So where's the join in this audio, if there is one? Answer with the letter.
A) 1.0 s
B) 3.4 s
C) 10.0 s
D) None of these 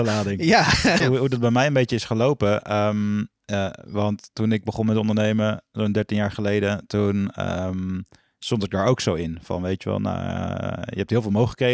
A